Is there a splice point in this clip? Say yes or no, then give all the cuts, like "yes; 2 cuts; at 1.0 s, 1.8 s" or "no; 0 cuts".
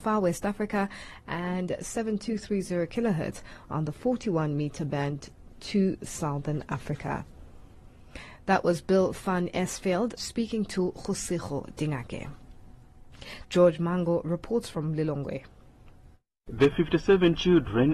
yes; 2 cuts; at 10.2 s, 13.4 s